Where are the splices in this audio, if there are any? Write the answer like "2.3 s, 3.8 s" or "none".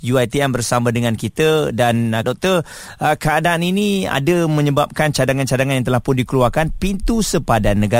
2.2 s